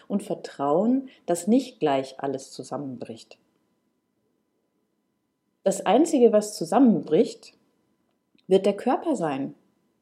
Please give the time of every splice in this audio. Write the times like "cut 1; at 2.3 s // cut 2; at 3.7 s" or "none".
none